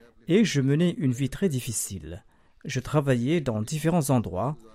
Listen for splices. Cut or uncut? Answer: uncut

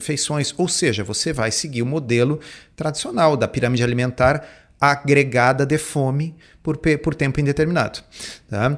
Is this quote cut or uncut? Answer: uncut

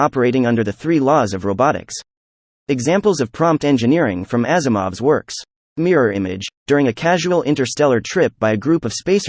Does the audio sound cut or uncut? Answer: cut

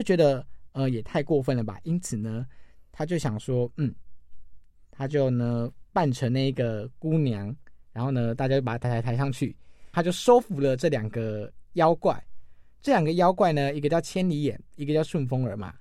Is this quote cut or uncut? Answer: cut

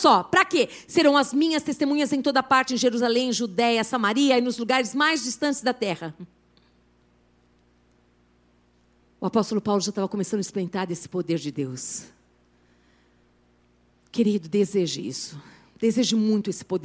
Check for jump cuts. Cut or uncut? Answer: uncut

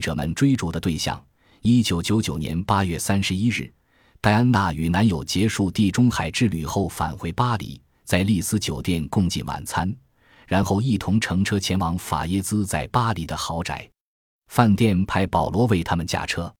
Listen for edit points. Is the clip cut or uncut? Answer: uncut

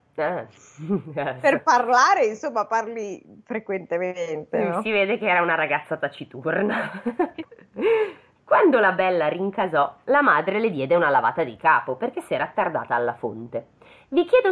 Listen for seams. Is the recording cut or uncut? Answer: uncut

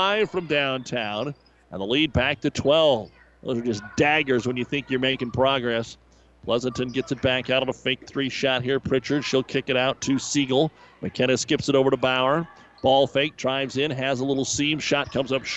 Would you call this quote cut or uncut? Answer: uncut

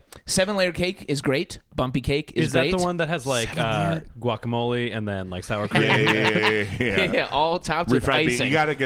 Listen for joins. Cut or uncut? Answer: cut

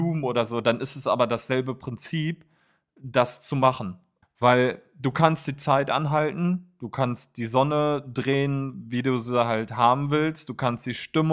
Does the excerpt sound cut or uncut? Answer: cut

